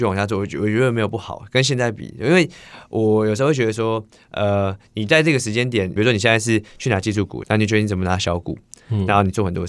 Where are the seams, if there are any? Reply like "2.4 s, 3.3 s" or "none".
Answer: 6.0 s, 7.4 s

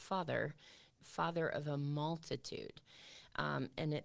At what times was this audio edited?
1.0 s

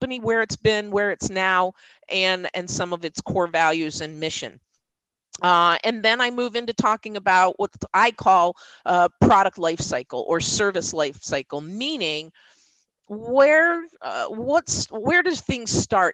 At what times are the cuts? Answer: none

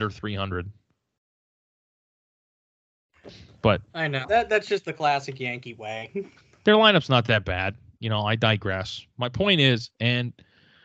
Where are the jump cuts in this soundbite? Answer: 4.2 s, 9.9 s

